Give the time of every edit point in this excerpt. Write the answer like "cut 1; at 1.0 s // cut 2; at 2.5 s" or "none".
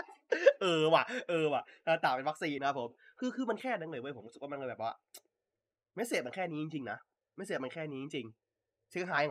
cut 1; at 2.6 s